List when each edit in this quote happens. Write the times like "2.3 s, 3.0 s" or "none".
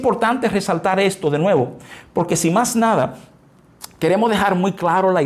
none